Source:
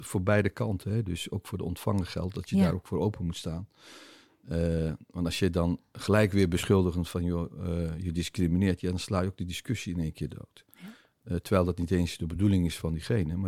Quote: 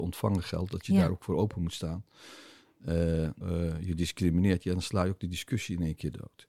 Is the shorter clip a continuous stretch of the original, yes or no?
no